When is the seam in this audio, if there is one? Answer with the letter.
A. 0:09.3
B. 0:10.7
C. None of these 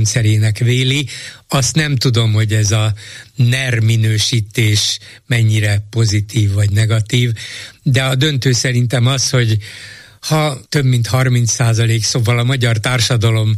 B